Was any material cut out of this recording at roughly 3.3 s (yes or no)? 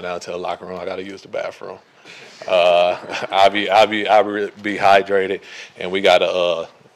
no